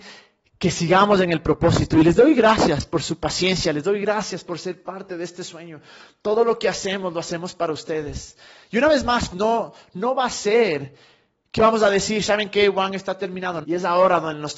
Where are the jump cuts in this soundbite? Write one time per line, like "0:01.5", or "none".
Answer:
0:09.3
0:13.6